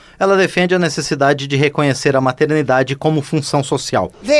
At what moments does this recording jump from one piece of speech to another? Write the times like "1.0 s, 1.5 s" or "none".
none